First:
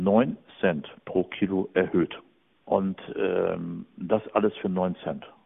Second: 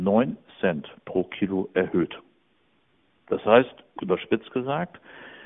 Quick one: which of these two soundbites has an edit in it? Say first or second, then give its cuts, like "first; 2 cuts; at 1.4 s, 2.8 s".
first; 1 cut; at 2.6 s